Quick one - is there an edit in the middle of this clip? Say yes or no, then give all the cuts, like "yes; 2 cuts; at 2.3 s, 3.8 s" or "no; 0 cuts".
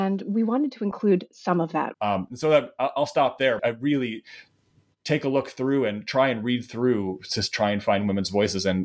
yes; 2 cuts; at 1.9 s, 3.6 s